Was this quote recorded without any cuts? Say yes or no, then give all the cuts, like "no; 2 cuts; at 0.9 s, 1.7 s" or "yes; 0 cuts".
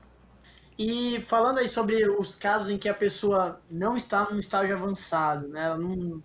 yes; 0 cuts